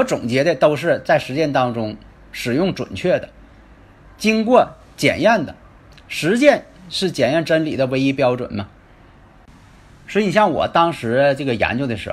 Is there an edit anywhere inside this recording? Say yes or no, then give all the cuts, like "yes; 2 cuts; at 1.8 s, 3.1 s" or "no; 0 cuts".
yes; 1 cut; at 9.9 s